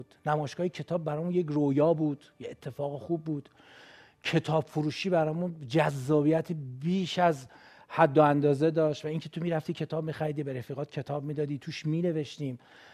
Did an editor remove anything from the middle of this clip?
no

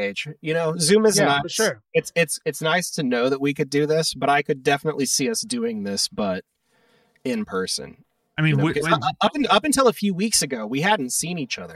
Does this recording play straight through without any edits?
yes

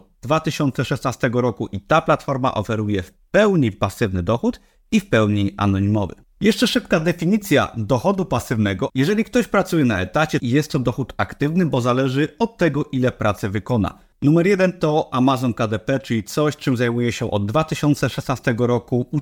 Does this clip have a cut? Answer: yes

